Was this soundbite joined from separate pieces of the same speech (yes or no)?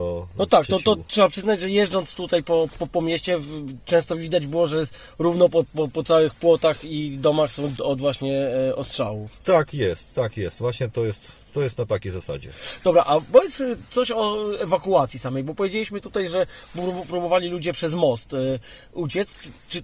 yes